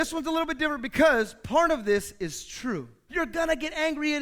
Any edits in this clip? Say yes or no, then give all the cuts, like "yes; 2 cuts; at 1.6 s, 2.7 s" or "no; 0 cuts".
yes; 1 cut; at 3.1 s